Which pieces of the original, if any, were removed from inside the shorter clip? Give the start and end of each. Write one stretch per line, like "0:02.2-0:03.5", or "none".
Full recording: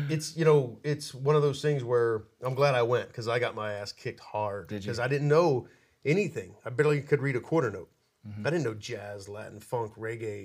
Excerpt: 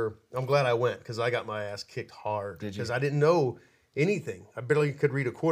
none